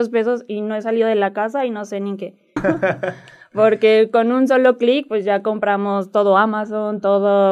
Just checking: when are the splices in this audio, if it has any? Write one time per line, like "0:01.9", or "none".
0:02.6